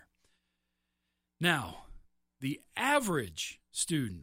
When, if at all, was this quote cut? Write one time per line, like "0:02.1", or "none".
none